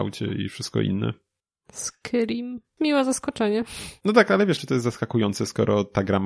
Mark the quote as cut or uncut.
cut